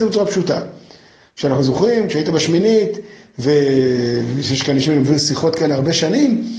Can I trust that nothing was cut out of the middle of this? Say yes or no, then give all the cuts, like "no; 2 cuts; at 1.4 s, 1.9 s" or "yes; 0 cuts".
yes; 0 cuts